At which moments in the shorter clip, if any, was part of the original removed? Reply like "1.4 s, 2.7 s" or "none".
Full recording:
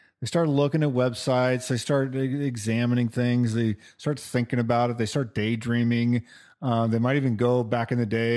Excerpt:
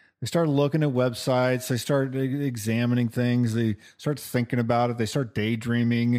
none